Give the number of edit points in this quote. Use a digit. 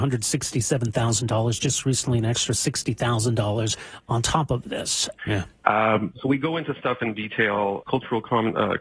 2